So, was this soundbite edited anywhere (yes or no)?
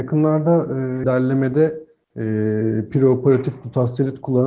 yes